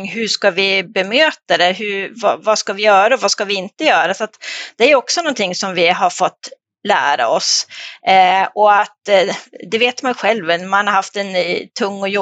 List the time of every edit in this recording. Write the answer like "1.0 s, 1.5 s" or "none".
none